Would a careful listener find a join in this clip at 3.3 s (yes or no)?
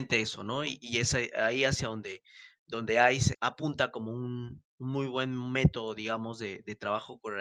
yes